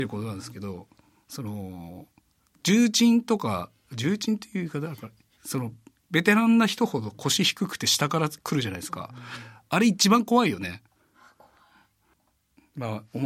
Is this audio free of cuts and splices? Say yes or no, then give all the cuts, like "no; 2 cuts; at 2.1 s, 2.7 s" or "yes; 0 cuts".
yes; 0 cuts